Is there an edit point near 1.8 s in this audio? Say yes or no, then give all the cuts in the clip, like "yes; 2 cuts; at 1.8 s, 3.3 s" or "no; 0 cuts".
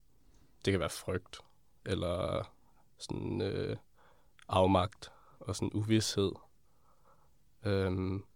no; 1 cut; at 5.4 s